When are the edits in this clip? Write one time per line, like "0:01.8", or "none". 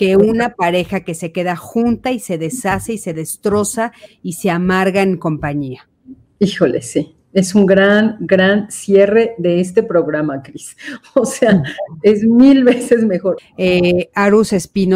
0:13.4